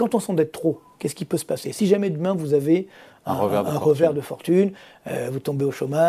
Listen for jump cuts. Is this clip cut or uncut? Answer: uncut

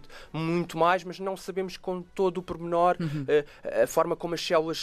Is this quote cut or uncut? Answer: uncut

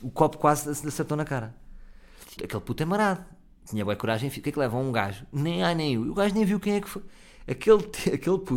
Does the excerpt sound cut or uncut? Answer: cut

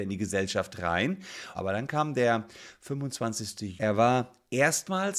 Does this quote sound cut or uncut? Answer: cut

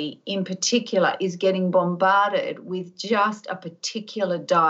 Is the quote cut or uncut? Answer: uncut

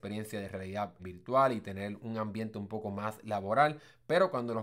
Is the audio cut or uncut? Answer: cut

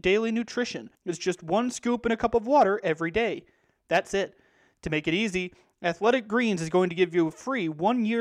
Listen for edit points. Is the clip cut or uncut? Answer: cut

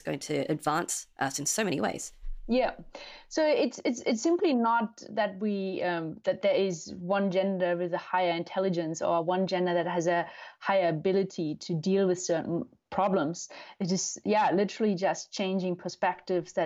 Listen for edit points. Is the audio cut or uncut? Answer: uncut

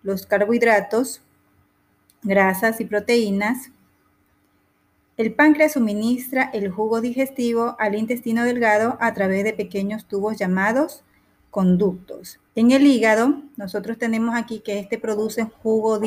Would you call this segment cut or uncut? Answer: cut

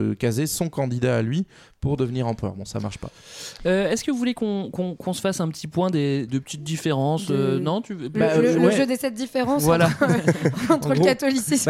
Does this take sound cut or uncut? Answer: cut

